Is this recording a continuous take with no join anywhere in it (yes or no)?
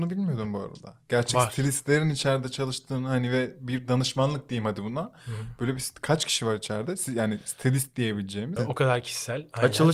no